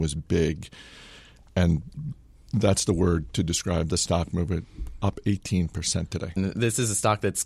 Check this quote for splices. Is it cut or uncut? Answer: cut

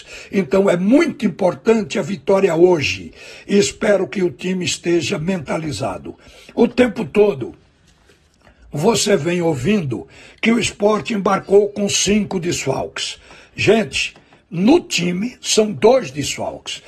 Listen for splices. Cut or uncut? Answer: uncut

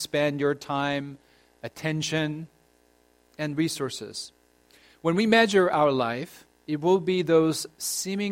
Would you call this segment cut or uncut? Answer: uncut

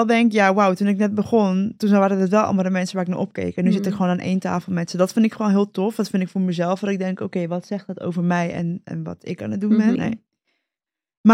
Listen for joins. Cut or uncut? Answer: cut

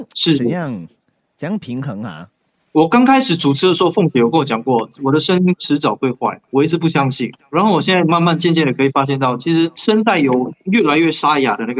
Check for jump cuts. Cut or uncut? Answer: uncut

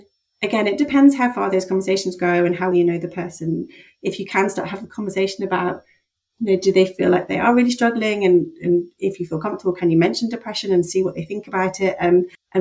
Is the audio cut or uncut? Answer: cut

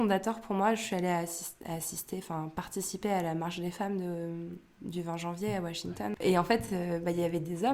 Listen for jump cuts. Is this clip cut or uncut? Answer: uncut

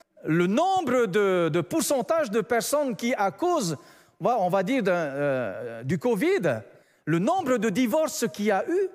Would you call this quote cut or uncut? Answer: uncut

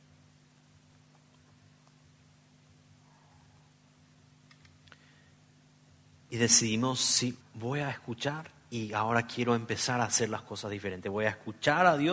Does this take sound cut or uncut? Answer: cut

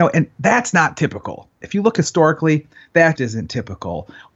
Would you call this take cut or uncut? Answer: cut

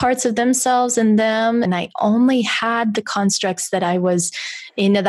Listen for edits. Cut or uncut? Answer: cut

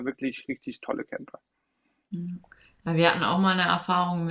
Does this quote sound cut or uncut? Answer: uncut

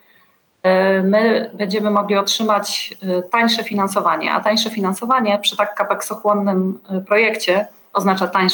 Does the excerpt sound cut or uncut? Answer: uncut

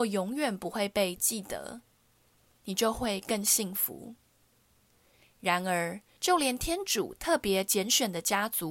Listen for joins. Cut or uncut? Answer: cut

